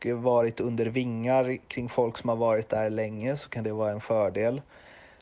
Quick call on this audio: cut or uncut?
uncut